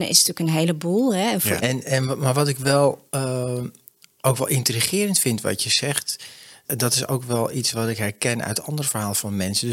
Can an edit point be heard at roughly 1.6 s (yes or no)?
yes